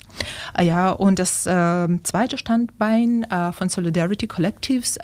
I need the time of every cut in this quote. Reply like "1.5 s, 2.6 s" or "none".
none

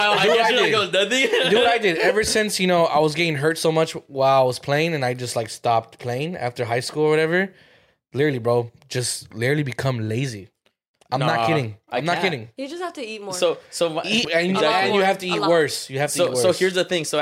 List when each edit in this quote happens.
14.2 s

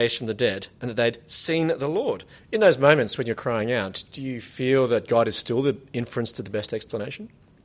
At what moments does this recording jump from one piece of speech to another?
2.4 s

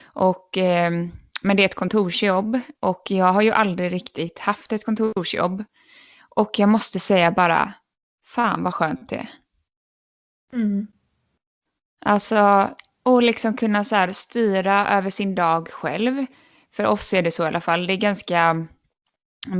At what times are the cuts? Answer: none

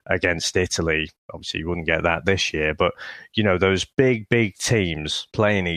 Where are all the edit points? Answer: none

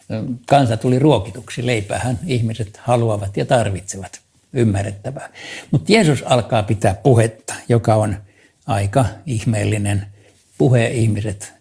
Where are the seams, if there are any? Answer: none

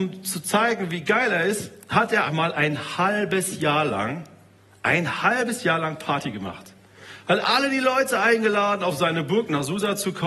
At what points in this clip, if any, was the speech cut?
2.3 s

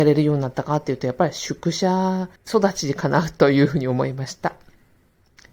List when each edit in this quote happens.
2.4 s

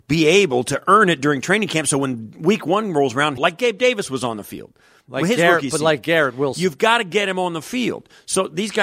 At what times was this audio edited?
3.4 s

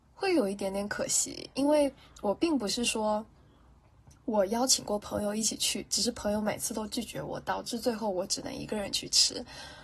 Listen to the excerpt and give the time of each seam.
none

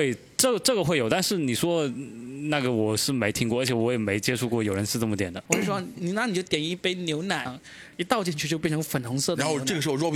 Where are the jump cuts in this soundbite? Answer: 5.5 s, 7.5 s

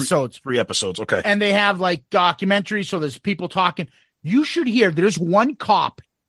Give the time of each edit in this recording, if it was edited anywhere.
none

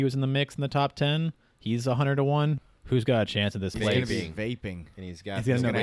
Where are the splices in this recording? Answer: 2.6 s, 3.7 s

